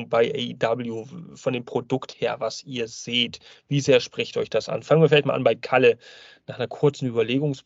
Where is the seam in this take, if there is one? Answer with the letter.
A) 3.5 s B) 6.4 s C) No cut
C